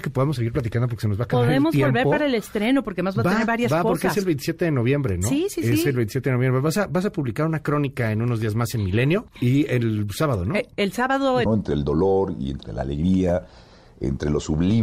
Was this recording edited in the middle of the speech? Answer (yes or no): yes